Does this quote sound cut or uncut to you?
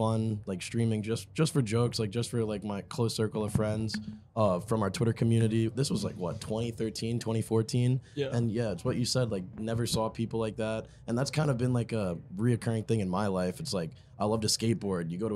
uncut